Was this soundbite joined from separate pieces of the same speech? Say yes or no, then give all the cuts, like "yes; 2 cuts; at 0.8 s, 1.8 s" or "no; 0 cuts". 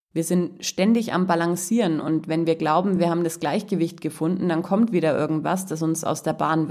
no; 0 cuts